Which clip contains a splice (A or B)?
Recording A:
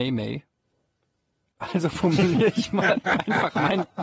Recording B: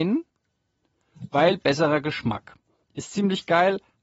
A